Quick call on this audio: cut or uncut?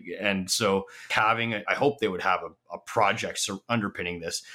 cut